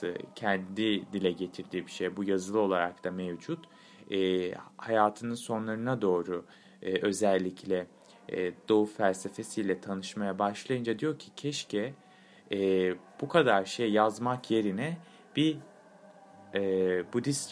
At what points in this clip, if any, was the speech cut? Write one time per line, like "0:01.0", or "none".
none

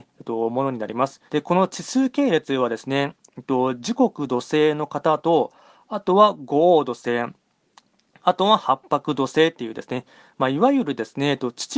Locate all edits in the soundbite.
0:01.3

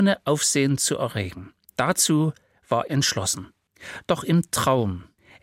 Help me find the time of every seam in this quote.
0:02.9

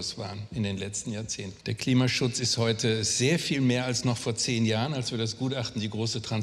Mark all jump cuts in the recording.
0:01.6

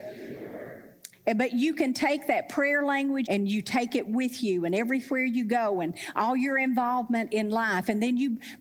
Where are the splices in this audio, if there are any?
0:01.1
0:03.3

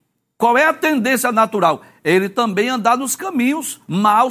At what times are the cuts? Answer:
none

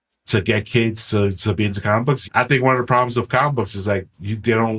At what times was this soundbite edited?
0:02.2

